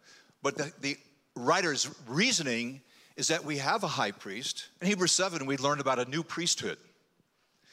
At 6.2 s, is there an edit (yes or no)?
no